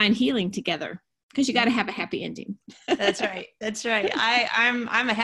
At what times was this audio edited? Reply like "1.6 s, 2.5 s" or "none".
none